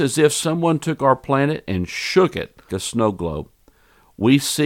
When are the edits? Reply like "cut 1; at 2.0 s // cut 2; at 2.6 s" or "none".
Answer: cut 1; at 2.7 s